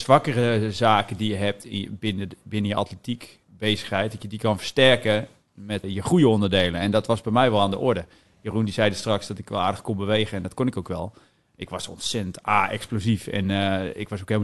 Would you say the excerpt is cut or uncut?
cut